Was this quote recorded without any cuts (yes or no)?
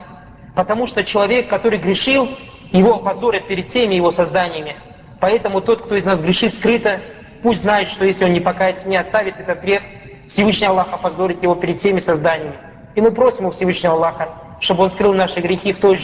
yes